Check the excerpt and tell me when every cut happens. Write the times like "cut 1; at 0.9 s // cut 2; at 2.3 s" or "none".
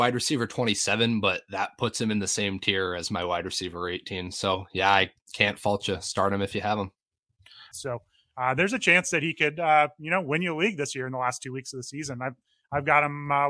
cut 1; at 7.7 s